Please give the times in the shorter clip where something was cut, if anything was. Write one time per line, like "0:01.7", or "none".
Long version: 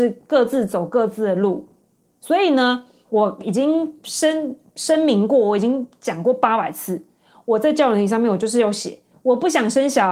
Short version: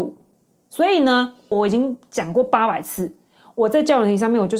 0:01.5